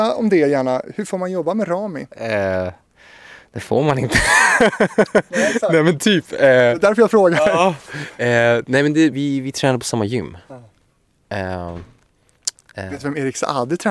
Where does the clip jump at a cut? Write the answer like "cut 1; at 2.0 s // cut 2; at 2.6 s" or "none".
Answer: cut 1; at 9.1 s // cut 2; at 12.6 s